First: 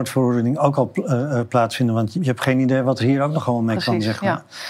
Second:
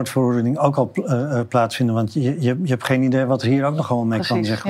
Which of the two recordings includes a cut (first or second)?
first